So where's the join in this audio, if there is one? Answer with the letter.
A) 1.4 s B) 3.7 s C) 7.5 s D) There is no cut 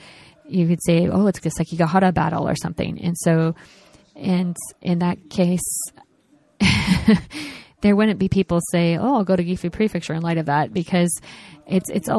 A